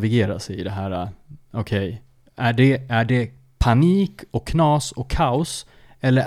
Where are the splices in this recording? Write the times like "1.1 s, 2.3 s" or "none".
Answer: none